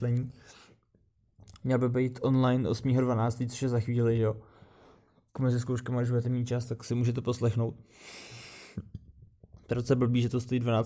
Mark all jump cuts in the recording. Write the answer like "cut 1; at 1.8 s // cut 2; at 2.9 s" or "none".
none